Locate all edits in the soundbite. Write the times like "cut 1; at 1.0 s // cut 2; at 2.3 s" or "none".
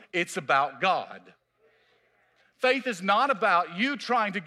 none